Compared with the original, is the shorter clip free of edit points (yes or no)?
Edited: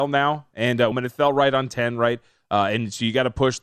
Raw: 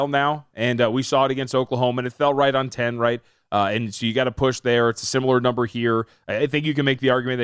no